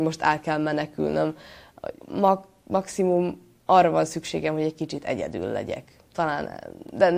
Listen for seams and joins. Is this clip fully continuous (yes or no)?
no